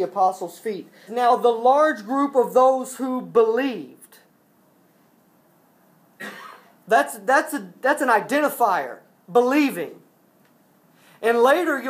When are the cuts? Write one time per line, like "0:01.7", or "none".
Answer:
0:01.1